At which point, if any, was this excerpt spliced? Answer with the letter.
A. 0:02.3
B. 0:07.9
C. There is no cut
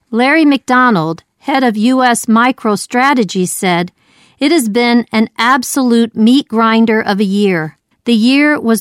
B